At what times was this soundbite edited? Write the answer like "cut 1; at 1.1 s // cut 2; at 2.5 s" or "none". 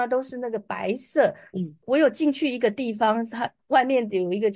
cut 1; at 1.5 s